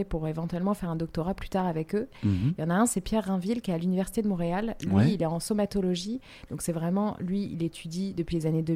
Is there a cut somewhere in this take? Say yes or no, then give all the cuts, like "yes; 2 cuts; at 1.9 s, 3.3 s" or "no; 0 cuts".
no; 0 cuts